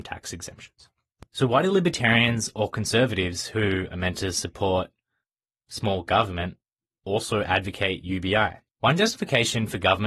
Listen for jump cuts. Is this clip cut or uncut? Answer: cut